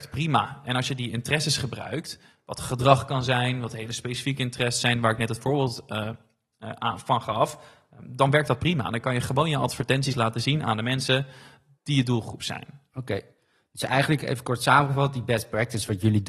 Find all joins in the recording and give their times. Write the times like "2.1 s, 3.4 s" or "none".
none